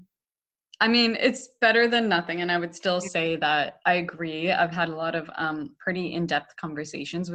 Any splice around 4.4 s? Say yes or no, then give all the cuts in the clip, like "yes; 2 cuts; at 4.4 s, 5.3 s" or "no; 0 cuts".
no; 0 cuts